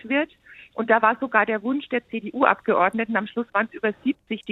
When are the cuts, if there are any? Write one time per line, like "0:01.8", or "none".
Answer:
none